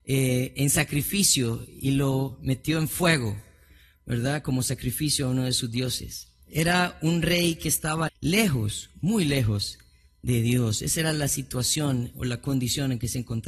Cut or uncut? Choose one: cut